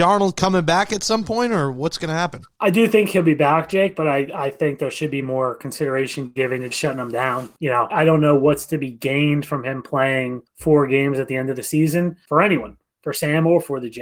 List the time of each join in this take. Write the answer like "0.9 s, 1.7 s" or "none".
6.7 s, 7.9 s